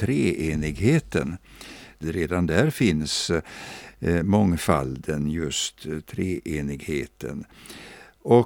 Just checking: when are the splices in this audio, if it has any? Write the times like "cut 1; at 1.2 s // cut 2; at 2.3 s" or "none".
cut 1; at 2.0 s

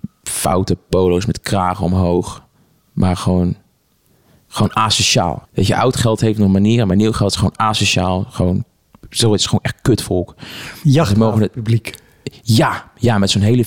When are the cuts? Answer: cut 1; at 5.4 s

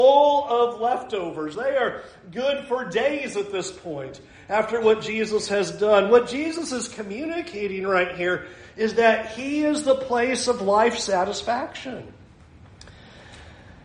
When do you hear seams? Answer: none

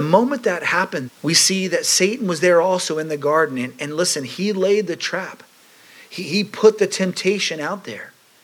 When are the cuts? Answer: cut 1; at 1.1 s

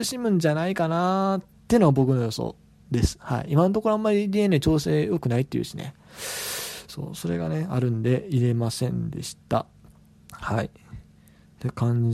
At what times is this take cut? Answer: none

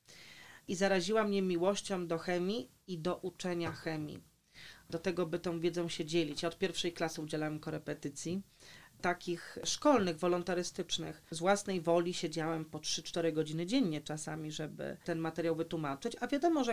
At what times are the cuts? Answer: none

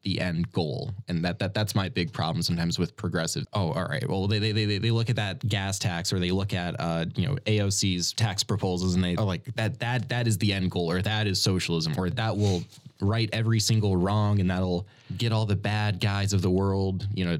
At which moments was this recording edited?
cut 1; at 3.4 s // cut 2; at 9.2 s

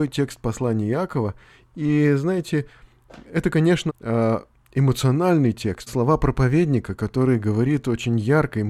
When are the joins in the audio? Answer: cut 1; at 3.9 s // cut 2; at 5.9 s

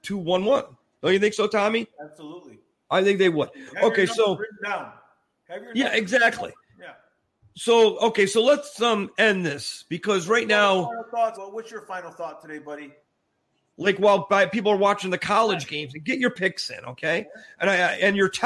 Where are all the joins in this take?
cut 1; at 0.9 s // cut 2; at 11.3 s // cut 3; at 13.7 s

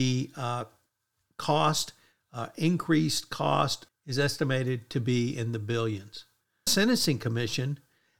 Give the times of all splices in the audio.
cut 1; at 3.9 s // cut 2; at 6.7 s

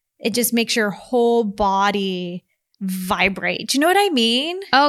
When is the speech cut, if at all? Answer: none

